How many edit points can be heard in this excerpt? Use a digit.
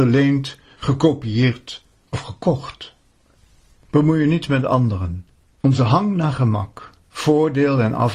2